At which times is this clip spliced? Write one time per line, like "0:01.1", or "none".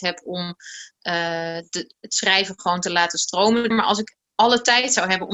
0:03.7